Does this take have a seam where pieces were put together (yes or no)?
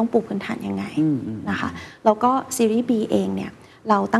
no